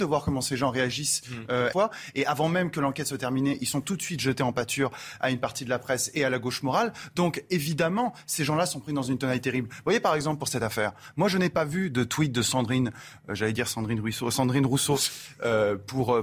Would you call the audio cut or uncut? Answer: cut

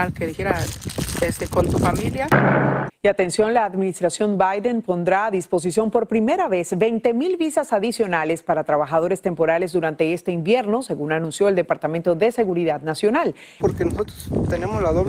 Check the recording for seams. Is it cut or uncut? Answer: cut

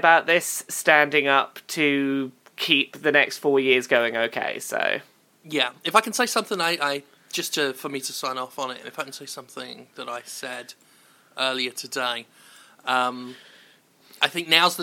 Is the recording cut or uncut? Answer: cut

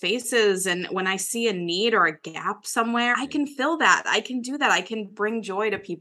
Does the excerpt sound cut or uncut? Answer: cut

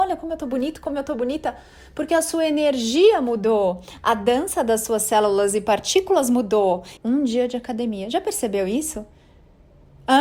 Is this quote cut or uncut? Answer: cut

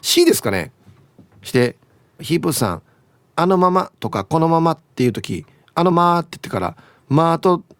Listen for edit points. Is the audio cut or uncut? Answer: cut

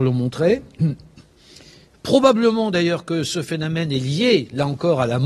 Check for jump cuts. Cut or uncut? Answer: uncut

